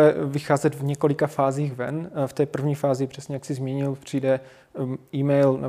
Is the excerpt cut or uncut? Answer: uncut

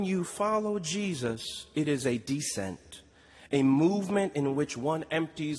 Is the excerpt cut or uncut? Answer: uncut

